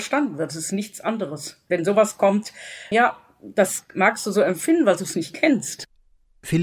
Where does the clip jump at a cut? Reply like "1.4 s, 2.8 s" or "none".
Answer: 2.9 s

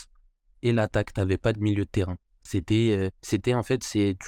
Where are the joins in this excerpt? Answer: 3.2 s

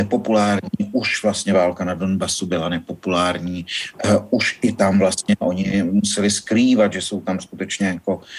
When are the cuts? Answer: none

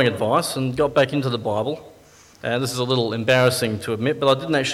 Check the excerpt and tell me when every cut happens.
2.3 s

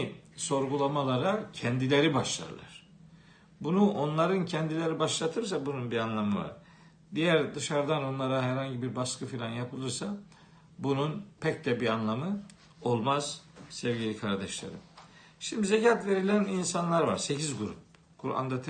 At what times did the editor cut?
none

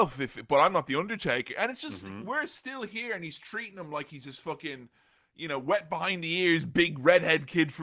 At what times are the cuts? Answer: none

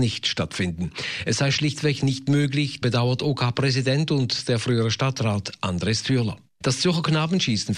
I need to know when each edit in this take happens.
2.8 s, 6.6 s

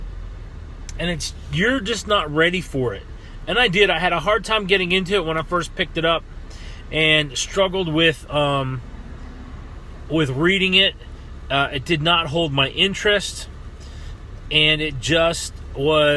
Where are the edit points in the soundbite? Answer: none

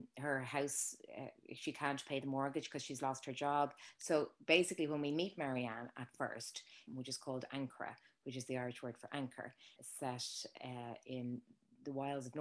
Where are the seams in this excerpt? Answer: 3.9 s, 6.9 s, 9.8 s

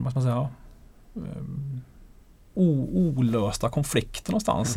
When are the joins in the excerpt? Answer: 2.5 s

